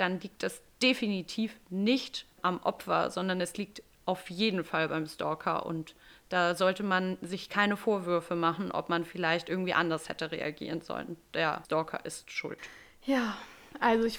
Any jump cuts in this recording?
no; 0 cuts

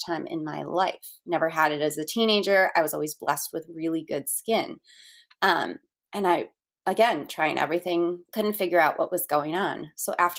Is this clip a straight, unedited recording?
no; 2 cuts; at 5.3 s, 8.3 s

